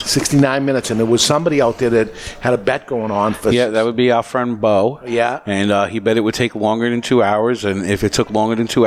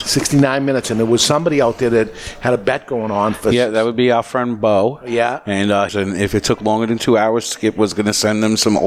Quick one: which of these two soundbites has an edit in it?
second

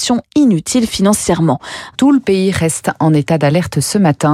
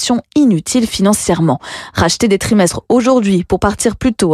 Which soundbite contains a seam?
first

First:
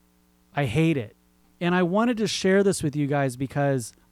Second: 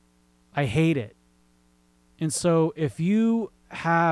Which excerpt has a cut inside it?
first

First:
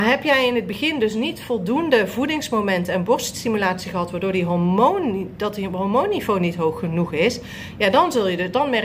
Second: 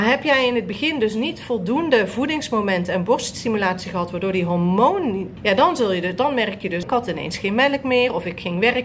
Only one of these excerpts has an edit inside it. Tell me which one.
second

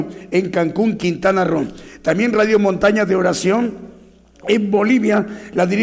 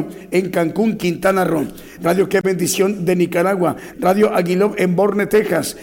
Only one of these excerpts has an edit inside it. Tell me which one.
second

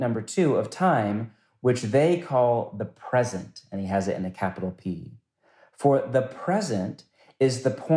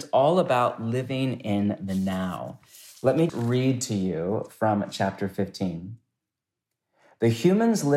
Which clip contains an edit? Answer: second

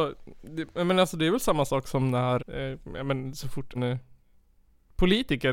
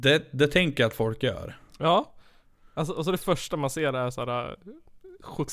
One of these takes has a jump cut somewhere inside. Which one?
first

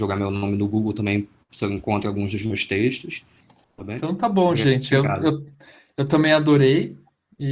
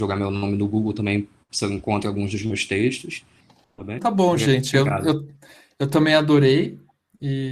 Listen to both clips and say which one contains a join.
second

